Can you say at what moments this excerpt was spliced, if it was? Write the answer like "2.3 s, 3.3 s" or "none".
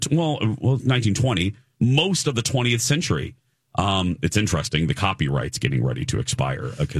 none